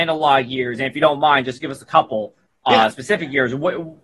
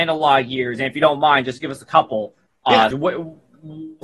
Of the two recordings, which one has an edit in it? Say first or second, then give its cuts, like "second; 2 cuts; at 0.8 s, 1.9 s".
second; 1 cut; at 2.9 s